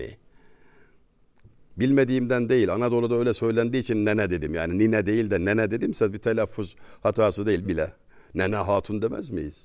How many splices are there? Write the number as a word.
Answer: one